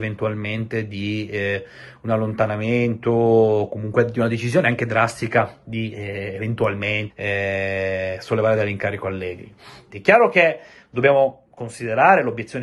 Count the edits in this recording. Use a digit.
2